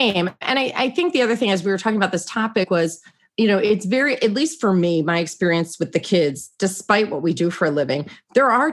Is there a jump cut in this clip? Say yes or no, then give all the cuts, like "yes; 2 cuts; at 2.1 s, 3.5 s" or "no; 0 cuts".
no; 0 cuts